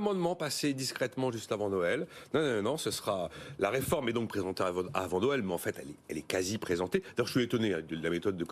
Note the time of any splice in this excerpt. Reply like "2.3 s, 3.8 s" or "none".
none